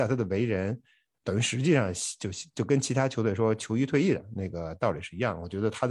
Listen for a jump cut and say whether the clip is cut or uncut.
cut